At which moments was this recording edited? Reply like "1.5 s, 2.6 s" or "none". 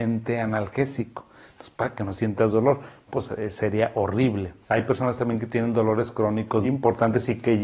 3.1 s, 4.6 s, 6.6 s